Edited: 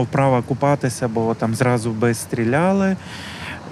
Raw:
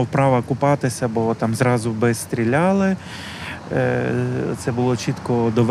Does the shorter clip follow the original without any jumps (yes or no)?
yes